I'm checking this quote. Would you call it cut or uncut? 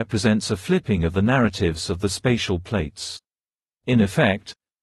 cut